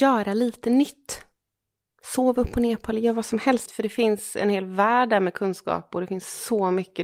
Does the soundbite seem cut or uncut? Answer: cut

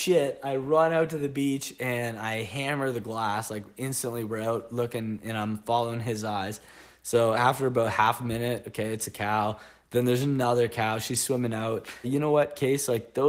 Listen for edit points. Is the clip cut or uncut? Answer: cut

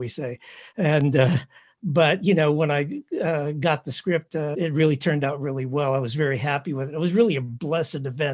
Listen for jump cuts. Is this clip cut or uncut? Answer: cut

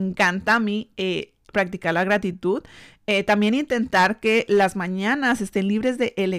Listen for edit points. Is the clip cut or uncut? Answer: uncut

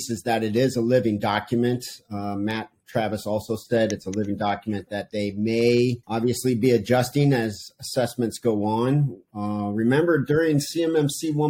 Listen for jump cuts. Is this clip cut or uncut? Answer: uncut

